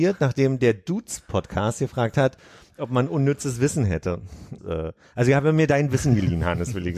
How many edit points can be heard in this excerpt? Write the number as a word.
one